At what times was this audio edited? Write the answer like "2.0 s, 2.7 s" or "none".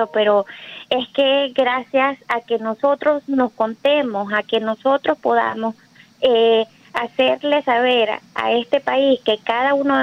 none